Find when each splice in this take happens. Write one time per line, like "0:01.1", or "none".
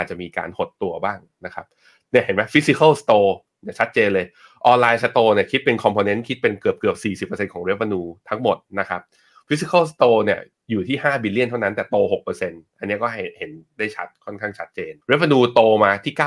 0:15.0